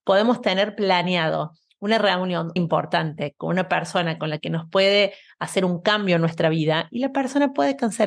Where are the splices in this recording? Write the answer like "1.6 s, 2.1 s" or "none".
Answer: 2.6 s